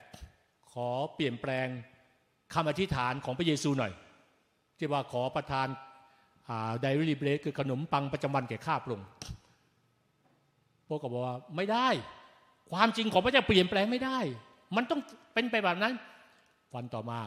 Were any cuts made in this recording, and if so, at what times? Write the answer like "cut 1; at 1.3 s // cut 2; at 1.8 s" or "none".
none